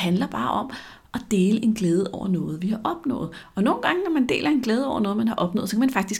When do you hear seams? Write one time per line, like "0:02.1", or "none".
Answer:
none